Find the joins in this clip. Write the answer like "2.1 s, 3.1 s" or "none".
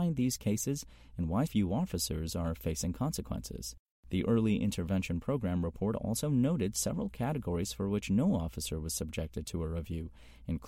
1.5 s